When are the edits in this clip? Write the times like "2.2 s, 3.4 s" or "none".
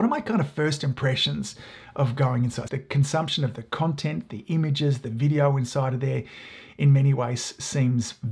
2.7 s